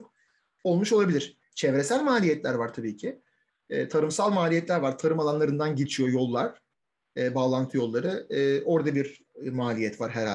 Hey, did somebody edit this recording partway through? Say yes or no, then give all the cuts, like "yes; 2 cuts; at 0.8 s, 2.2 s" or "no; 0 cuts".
no; 0 cuts